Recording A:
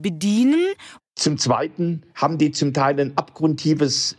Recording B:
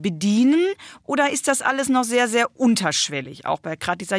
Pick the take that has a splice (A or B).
A